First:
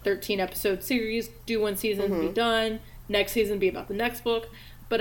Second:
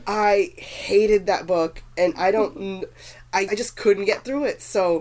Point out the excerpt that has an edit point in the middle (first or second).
second